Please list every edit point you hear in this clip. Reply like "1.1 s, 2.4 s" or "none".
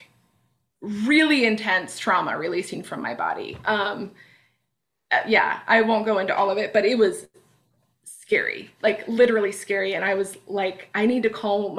none